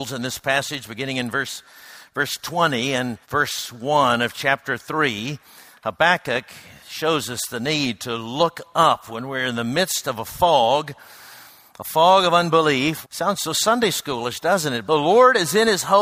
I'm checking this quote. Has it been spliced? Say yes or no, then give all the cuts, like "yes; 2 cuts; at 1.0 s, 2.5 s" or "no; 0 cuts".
yes; 3 cuts; at 3.2 s, 13.0 s, 14.9 s